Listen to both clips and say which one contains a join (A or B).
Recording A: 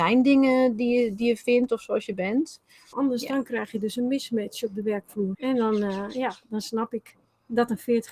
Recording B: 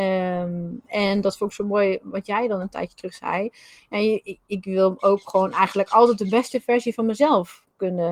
A